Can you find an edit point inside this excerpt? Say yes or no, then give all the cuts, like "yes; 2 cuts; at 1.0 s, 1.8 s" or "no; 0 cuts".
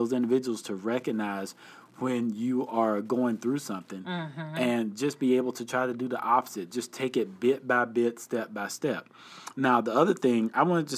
no; 0 cuts